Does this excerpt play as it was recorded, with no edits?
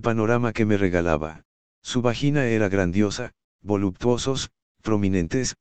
no; 2 cuts; at 1.6 s, 3.5 s

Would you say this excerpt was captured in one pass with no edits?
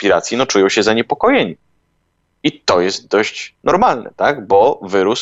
yes; 0 cuts

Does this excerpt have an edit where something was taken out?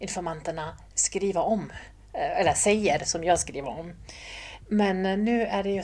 yes; 1 cut; at 4.6 s

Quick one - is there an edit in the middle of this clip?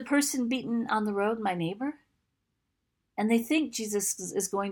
no; 0 cuts

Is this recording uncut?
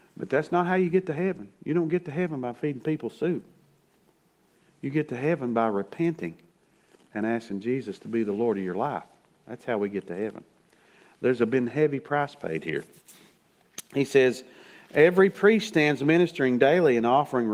yes; 0 cuts

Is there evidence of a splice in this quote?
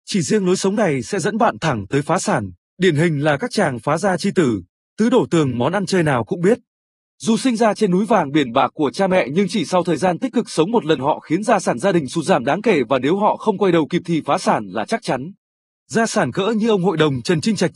yes; 1 cut; at 2.6 s

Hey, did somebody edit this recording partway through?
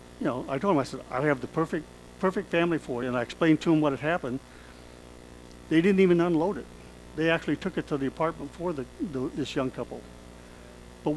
no; 0 cuts

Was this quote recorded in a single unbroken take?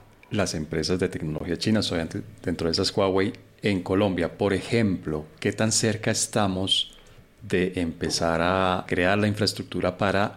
yes; 0 cuts

